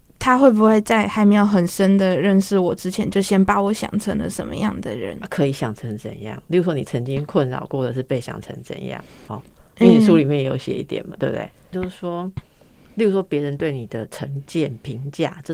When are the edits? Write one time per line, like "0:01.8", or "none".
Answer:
0:09.3
0:11.7

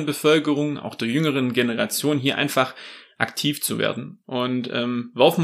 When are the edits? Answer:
0:04.2

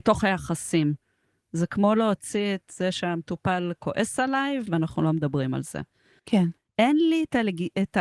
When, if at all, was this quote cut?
0:04.7
0:06.2

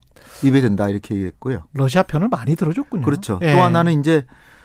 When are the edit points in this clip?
none

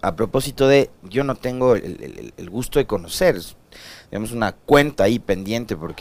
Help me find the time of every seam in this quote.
none

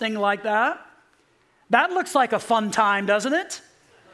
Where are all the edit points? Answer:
none

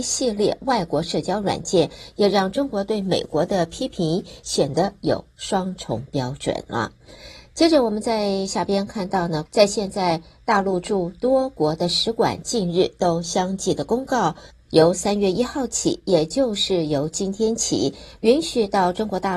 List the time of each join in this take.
0:09.5

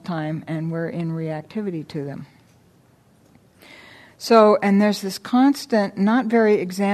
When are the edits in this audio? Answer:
none

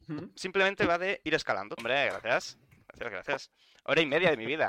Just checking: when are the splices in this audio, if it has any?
0:01.8

